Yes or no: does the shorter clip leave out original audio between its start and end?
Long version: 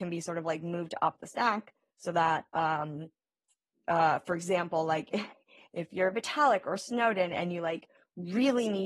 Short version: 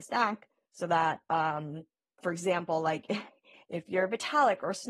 yes